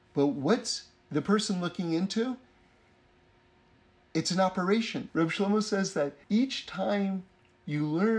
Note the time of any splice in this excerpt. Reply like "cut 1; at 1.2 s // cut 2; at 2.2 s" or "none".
cut 1; at 5.1 s // cut 2; at 6.2 s